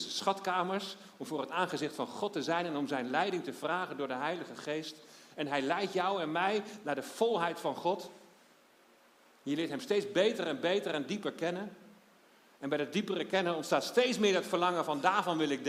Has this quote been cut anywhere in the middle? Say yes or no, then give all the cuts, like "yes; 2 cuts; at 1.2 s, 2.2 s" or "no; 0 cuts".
no; 0 cuts